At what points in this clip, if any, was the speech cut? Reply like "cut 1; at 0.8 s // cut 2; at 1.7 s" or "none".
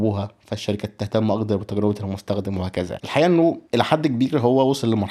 cut 1; at 3.0 s